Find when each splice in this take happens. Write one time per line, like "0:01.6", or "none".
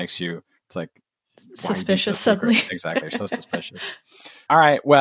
none